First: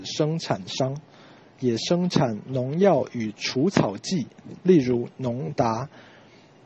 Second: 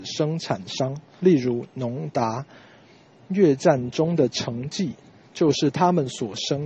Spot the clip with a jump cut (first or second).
second